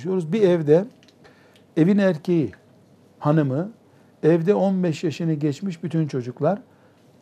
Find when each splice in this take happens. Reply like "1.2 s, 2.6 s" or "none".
3.2 s